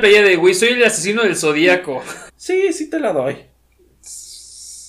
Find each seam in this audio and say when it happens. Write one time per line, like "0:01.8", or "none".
0:02.3